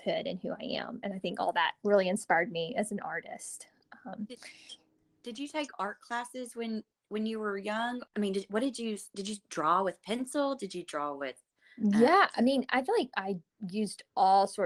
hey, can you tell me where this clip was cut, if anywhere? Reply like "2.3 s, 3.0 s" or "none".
none